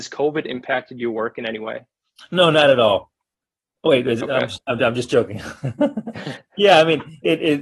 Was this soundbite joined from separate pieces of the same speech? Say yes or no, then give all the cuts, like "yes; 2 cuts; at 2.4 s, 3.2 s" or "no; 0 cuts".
no; 0 cuts